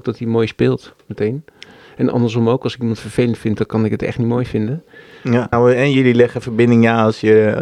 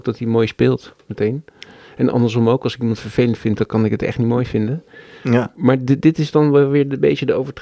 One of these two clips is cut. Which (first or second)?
first